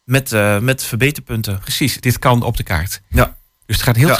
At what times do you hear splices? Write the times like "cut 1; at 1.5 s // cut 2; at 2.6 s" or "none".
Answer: cut 1; at 2.0 s